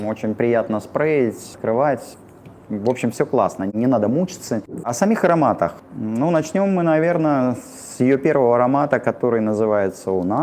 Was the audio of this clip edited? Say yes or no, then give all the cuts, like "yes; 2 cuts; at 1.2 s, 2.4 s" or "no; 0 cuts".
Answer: yes; 1 cut; at 4.8 s